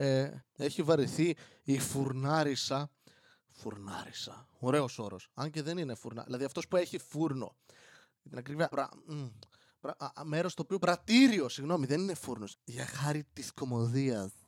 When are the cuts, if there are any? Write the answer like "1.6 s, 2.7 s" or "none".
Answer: 12.5 s